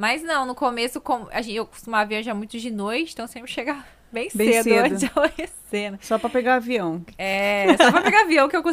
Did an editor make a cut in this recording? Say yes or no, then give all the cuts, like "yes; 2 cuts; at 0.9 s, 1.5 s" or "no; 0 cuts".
no; 0 cuts